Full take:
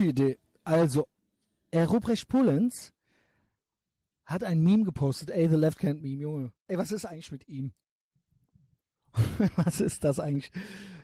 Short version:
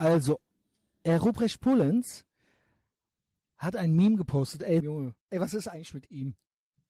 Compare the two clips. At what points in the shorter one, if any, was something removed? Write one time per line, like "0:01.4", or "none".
0:04.8